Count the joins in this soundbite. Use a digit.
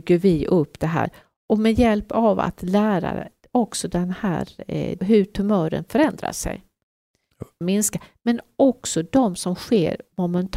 2